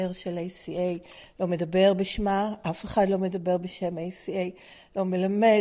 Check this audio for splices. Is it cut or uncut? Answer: uncut